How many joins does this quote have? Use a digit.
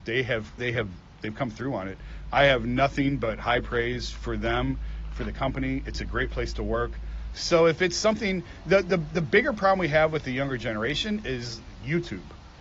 1